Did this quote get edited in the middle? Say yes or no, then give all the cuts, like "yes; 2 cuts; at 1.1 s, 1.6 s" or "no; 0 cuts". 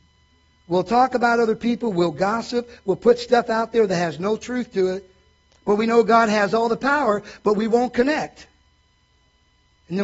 no; 0 cuts